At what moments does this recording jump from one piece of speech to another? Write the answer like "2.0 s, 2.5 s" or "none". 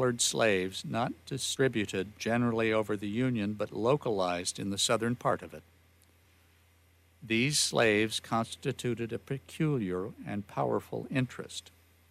none